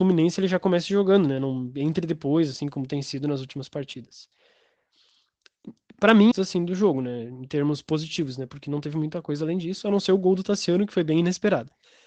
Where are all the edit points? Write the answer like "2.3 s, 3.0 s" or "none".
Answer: 6.3 s

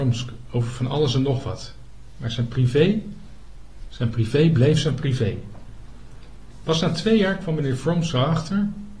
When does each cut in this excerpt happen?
none

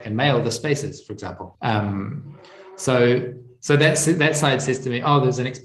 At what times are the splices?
1.5 s

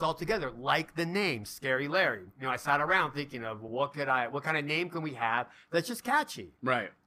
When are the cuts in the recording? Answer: none

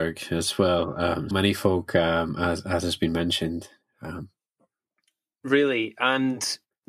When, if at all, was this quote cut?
1.3 s

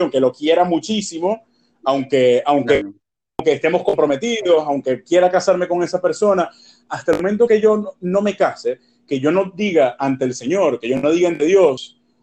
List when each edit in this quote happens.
none

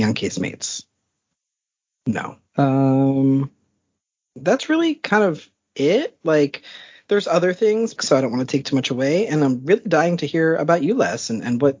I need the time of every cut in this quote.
2.5 s, 8.0 s

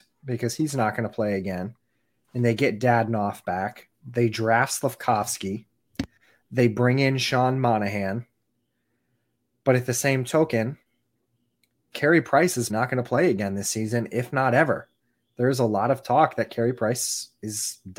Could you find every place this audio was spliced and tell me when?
12.7 s

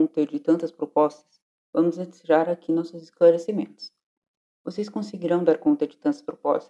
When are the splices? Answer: 4.4 s

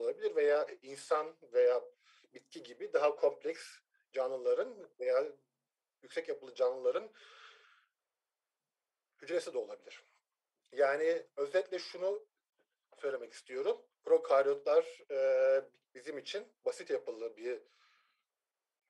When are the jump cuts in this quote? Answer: none

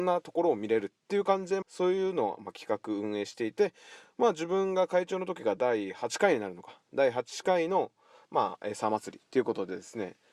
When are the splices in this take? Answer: 1.6 s

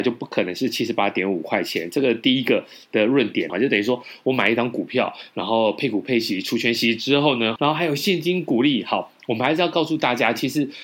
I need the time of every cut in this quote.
3.5 s, 7.6 s

